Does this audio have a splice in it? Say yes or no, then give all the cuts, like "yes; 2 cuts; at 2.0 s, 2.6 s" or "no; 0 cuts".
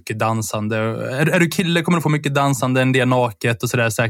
no; 0 cuts